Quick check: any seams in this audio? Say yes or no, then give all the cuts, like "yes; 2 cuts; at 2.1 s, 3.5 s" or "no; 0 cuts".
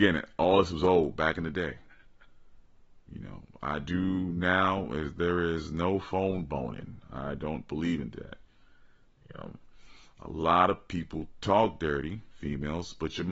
no; 0 cuts